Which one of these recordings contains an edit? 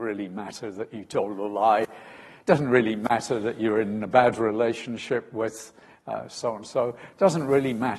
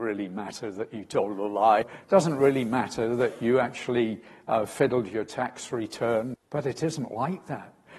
second; 2 cuts; at 1.8 s, 6.3 s

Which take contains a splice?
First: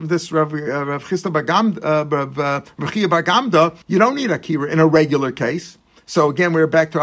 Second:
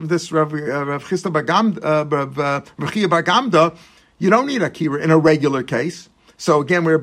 first; 1 cut; at 3.8 s

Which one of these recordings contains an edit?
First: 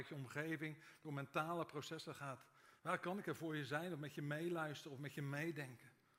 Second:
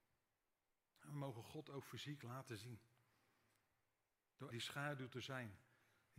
second; 1 cut; at 4.5 s

